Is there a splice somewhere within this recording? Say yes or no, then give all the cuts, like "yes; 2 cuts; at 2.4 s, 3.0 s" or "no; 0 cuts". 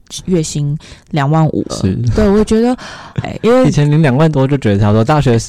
yes; 2 cuts; at 1.7 s, 3.2 s